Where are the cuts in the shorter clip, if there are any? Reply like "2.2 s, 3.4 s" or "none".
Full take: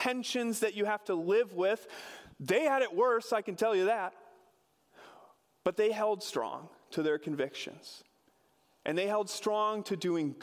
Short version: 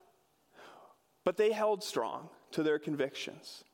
none